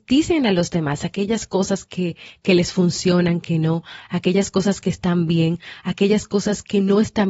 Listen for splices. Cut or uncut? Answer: uncut